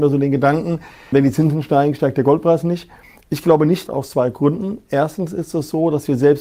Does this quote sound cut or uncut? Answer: cut